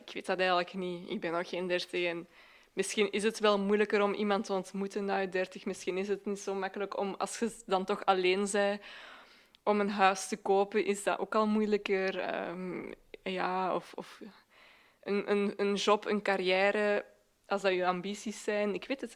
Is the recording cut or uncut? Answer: uncut